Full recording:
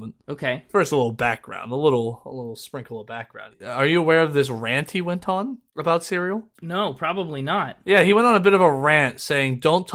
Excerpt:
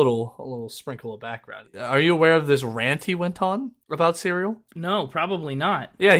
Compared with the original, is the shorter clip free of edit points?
yes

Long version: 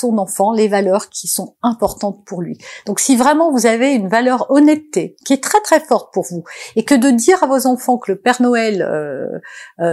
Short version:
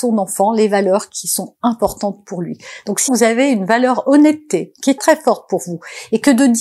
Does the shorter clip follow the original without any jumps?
no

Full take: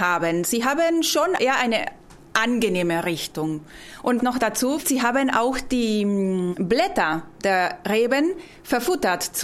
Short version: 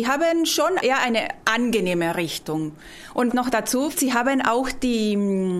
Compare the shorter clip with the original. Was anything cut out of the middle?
yes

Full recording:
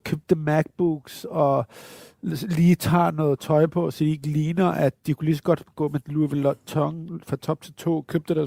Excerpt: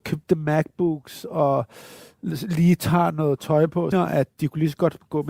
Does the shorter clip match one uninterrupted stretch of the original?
no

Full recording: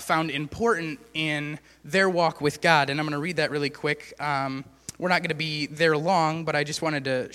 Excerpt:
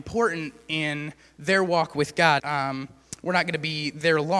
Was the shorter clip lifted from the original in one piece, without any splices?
no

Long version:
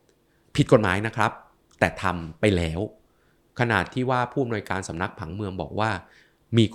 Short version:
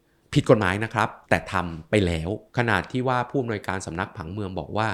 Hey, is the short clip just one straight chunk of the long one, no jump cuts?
no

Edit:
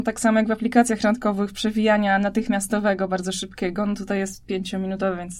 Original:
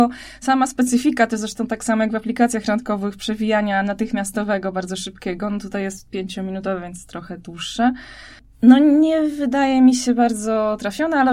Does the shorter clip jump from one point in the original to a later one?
no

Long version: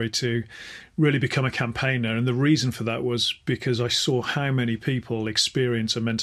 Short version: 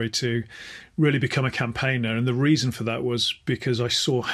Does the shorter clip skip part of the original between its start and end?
no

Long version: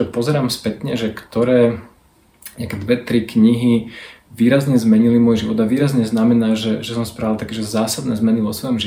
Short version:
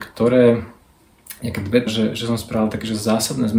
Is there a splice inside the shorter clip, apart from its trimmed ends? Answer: yes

